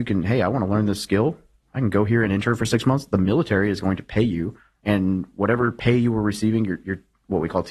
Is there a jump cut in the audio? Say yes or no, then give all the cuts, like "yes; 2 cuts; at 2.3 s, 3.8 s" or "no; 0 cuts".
no; 0 cuts